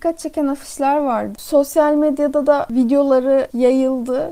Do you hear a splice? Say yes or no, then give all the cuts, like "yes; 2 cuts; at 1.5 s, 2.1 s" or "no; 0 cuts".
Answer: yes; 1 cut; at 1.4 s